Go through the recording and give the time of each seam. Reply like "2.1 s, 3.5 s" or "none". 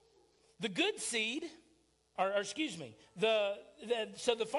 none